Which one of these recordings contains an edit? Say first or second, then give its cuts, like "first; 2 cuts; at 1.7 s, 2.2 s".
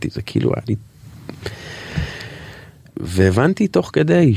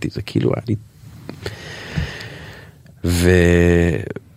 first; 1 cut; at 2.9 s